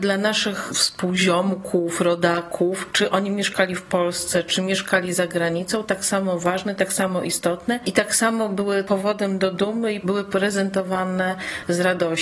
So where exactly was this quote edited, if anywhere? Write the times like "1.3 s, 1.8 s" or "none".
none